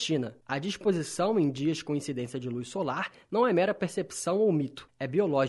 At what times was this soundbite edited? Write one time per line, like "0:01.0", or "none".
none